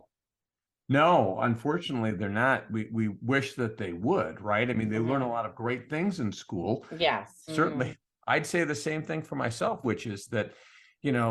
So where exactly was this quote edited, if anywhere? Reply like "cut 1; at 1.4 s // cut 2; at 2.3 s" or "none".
cut 1; at 7.5 s // cut 2; at 9.8 s